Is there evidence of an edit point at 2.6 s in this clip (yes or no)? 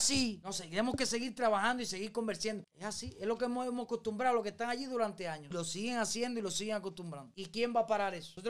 yes